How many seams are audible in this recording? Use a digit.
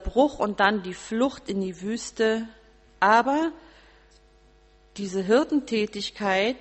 1